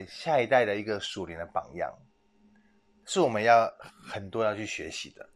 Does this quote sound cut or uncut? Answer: uncut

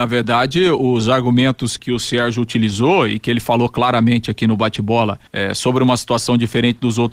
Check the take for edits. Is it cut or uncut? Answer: cut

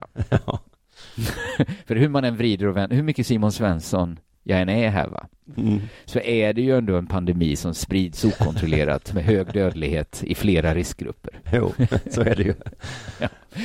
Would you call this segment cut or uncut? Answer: cut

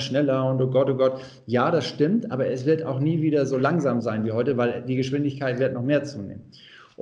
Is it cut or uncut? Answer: uncut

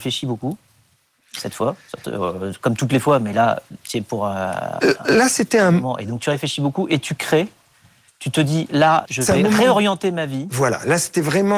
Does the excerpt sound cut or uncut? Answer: cut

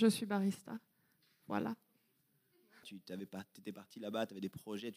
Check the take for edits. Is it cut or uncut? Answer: cut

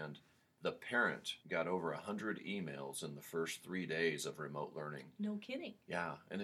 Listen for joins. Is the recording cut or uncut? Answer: cut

